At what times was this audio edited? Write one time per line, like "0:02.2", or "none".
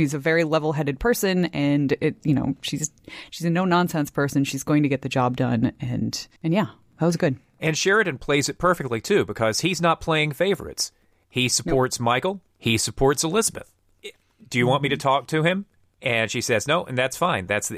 0:06.4